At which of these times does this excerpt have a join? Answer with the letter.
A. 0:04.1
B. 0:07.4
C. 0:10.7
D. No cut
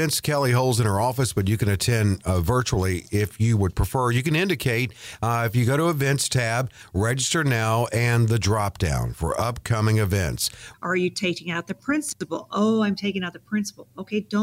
C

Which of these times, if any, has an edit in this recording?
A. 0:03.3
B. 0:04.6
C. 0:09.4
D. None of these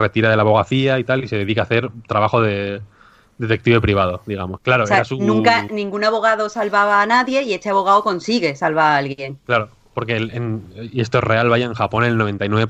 B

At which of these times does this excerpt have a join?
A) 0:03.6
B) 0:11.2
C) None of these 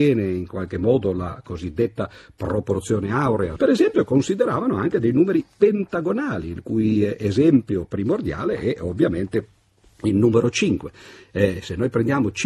A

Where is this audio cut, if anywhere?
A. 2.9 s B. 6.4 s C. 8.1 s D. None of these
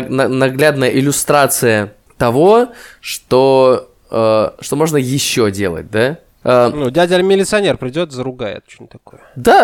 B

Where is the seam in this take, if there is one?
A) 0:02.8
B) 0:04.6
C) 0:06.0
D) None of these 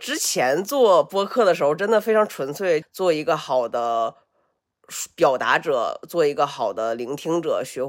A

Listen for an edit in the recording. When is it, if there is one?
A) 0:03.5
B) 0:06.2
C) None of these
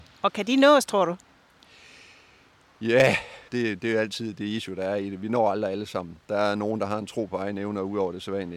A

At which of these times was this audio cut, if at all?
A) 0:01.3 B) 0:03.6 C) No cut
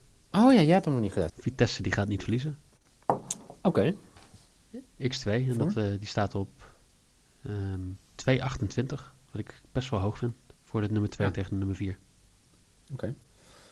A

